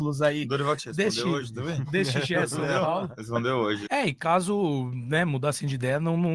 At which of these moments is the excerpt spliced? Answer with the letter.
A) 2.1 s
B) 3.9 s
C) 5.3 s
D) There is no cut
B